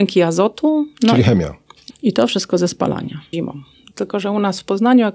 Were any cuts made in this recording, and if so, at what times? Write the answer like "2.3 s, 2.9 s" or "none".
1.9 s, 3.3 s